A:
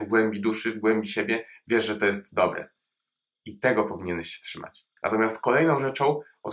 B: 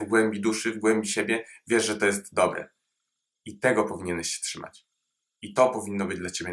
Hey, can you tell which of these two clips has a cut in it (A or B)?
A